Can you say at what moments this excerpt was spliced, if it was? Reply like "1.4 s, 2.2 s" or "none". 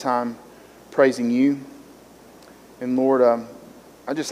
none